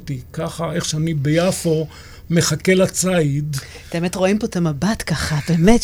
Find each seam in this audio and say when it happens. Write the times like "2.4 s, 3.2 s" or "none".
none